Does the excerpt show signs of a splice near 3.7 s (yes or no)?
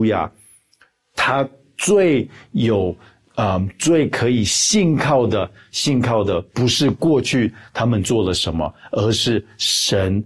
no